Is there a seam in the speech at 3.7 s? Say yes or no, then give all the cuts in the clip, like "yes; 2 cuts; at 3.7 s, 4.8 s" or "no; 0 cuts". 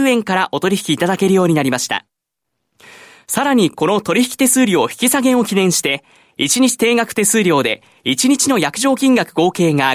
no; 0 cuts